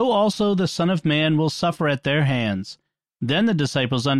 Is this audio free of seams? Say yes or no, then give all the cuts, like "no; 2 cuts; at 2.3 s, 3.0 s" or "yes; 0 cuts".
yes; 0 cuts